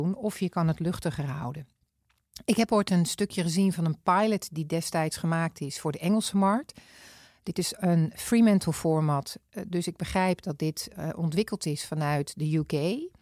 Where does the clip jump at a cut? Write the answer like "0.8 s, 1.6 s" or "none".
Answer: none